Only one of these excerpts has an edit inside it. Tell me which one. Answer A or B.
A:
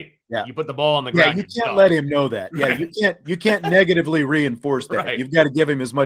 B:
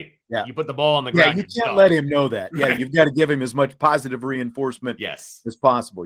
B